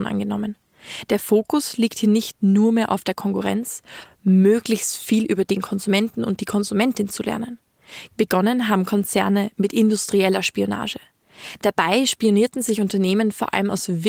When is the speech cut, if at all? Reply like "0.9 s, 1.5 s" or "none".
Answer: 4.0 s, 8.1 s